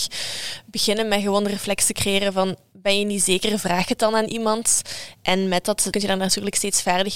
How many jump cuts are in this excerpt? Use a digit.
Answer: 1